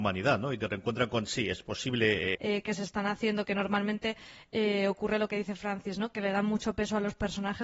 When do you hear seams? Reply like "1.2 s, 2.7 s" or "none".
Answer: 2.3 s